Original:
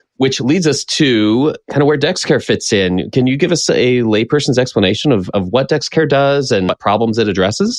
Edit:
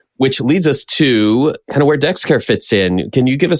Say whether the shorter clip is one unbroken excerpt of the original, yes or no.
yes